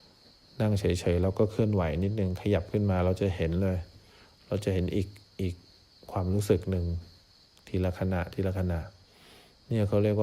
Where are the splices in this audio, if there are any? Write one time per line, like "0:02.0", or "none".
none